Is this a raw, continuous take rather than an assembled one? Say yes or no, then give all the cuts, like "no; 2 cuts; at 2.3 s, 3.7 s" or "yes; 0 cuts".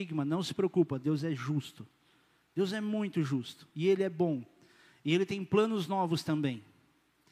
yes; 0 cuts